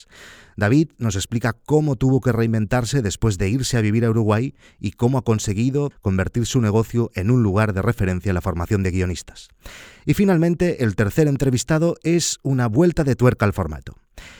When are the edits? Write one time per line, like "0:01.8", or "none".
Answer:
0:05.9